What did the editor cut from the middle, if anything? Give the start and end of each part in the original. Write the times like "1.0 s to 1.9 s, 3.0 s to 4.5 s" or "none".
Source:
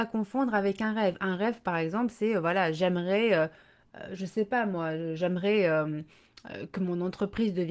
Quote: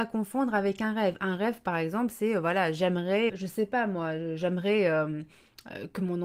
3.3 s to 4.1 s